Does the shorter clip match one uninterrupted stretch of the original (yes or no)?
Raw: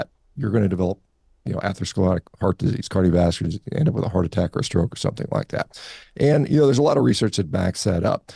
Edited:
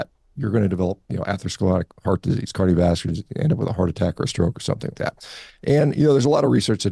no